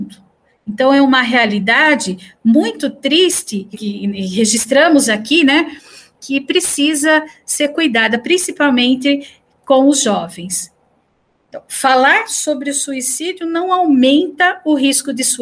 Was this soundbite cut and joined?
yes; 1 cut; at 3.7 s

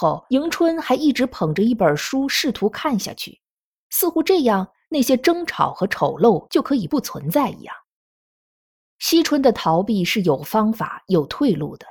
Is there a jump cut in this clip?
no; 0 cuts

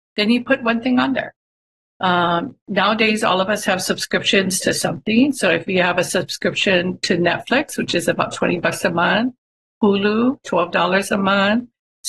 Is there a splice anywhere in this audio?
no; 0 cuts

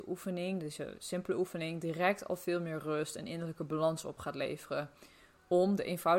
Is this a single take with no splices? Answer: yes; 0 cuts

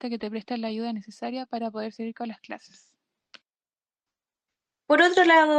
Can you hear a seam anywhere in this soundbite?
no; 0 cuts

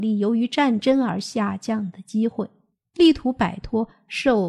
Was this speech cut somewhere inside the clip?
yes; 1 cut; at 2.9 s

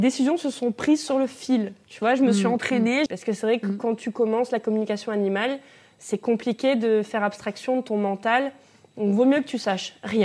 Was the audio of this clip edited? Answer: yes; 1 cut; at 3.1 s

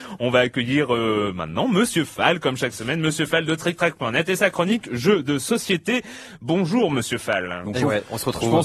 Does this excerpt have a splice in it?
yes; 1 cut; at 7.6 s

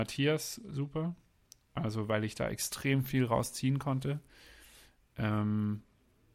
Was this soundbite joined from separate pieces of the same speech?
no; 0 cuts

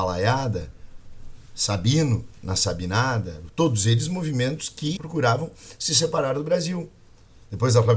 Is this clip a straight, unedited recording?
no; 2 cuts; at 3.5 s, 5.0 s

